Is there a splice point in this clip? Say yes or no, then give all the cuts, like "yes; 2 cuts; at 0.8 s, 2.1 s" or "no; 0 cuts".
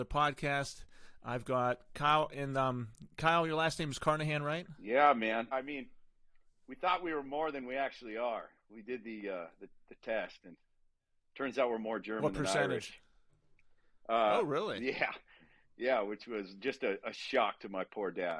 yes; 1 cut; at 5.5 s